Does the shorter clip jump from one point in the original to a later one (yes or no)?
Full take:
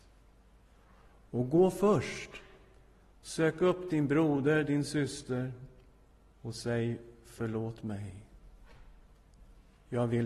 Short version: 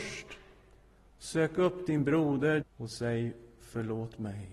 yes